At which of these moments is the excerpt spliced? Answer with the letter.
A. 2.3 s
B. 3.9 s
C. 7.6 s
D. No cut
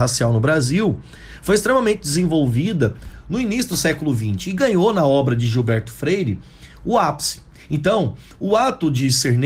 C